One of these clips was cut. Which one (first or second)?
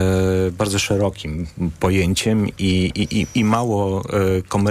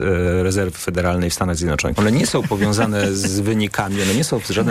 second